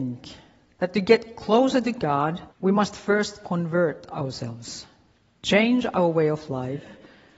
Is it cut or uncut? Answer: cut